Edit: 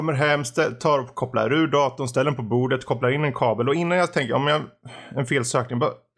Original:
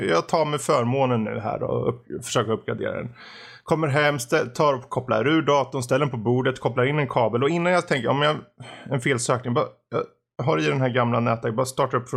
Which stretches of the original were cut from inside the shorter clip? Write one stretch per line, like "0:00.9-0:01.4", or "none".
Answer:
none